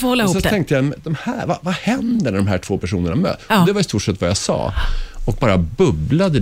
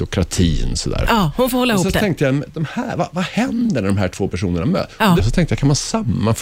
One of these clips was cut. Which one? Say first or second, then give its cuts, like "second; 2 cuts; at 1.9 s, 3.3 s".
second; 2 cuts; at 1.0 s, 5.2 s